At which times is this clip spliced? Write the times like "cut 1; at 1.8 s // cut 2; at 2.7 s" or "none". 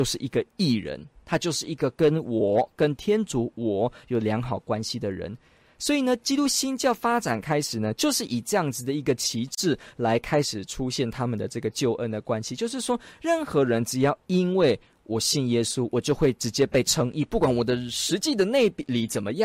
none